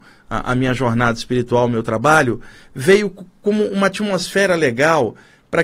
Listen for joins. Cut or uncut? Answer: uncut